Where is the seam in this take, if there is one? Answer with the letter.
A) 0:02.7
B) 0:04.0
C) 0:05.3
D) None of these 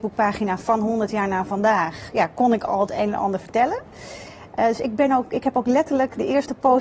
D